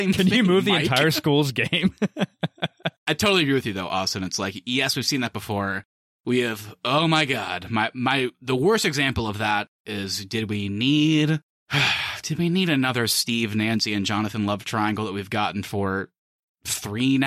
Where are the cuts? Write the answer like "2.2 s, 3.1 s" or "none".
none

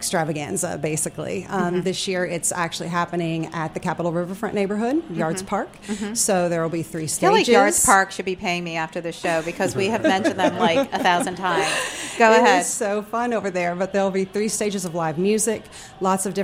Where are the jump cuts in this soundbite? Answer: none

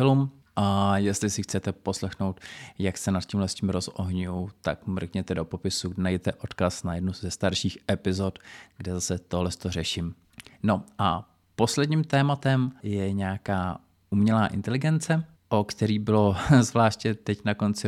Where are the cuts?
12.8 s

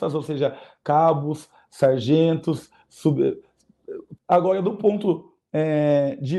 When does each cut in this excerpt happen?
4.2 s

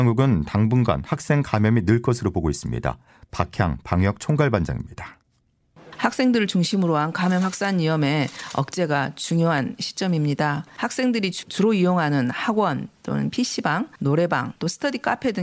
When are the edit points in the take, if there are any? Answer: none

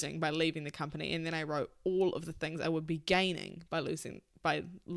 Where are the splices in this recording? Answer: none

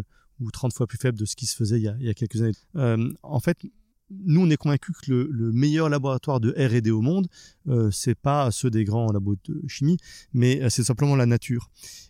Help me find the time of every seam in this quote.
2.5 s

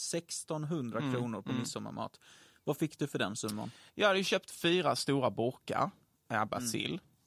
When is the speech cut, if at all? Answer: 3.9 s

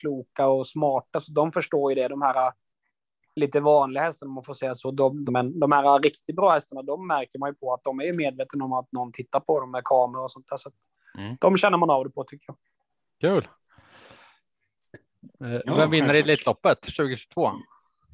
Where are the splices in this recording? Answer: 5.3 s, 15.4 s

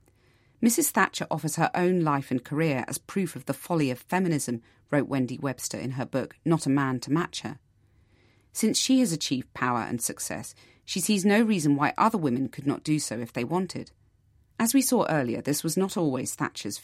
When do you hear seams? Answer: 14.5 s

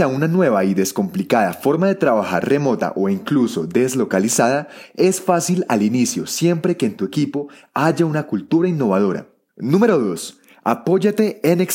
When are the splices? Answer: 9.5 s

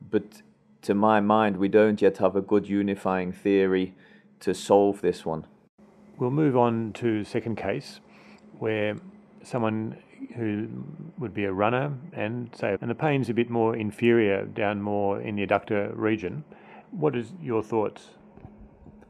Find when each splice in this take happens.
12.8 s, 16.8 s

